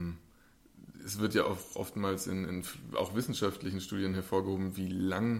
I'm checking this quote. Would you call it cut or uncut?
uncut